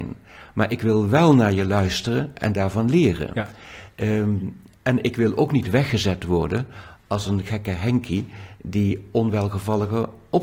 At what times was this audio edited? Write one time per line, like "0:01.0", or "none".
none